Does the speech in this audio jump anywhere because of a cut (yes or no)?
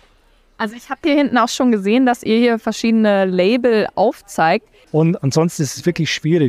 yes